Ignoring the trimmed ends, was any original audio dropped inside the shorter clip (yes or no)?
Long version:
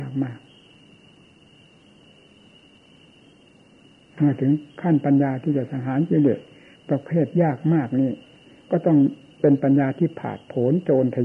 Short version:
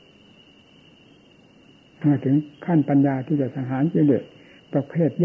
no